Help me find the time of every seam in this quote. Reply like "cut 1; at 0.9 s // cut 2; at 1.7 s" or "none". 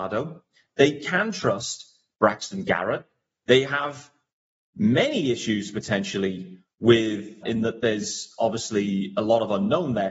cut 1; at 3.4 s // cut 2; at 7.4 s